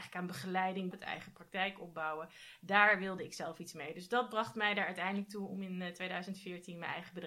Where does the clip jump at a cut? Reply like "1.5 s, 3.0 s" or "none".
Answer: 0.9 s